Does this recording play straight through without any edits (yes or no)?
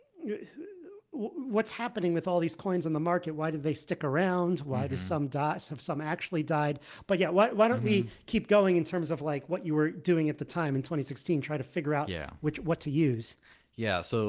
yes